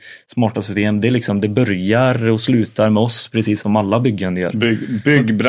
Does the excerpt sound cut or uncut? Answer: uncut